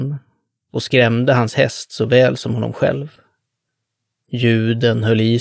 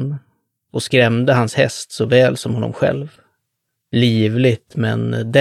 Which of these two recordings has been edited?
second; 1 cut; at 3.8 s

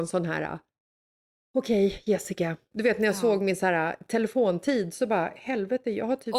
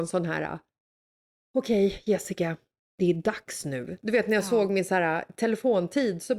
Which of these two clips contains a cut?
first; 1 cut; at 2.7 s

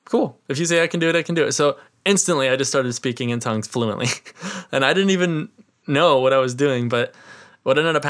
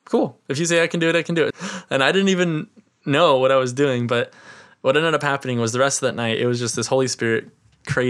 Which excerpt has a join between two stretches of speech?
second; 1 cut; at 1.5 s

